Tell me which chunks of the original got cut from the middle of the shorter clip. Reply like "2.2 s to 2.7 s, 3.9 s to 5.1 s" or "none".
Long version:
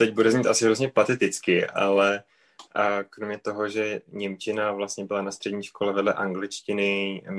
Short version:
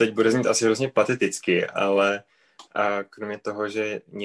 none